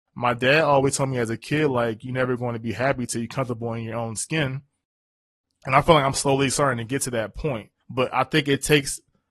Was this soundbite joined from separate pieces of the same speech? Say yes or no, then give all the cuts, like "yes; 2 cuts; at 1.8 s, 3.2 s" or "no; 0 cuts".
yes; 1 cut; at 7.8 s